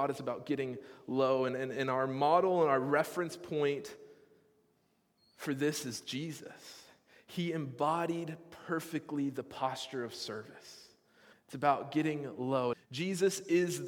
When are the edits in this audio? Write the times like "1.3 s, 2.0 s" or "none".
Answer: 11.3 s, 12.7 s